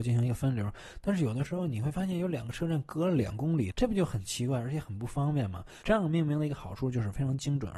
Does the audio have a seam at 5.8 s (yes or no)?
yes